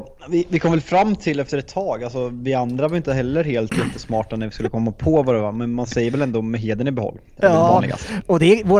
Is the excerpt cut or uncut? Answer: uncut